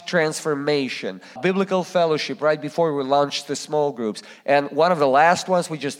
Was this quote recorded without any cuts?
no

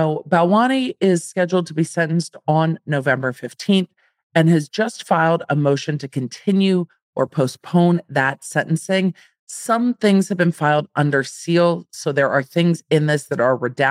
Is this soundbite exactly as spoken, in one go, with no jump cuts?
yes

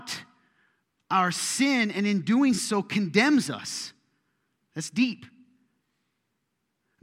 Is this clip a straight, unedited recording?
yes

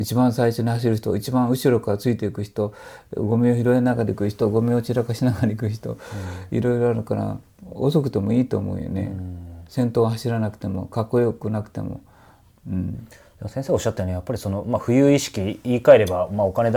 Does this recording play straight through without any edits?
yes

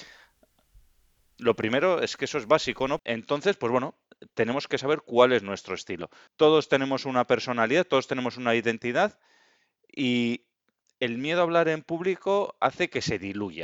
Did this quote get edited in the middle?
yes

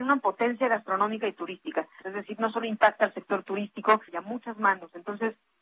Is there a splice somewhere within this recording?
yes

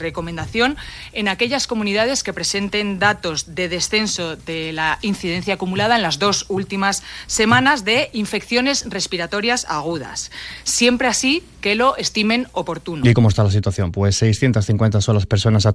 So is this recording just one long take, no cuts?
yes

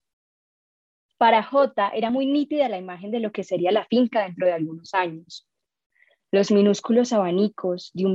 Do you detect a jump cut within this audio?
no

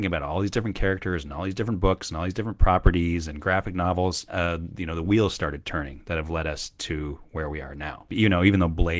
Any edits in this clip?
yes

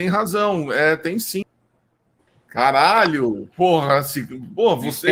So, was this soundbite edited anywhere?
yes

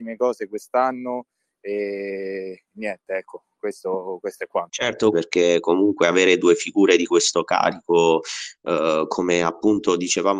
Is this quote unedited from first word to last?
no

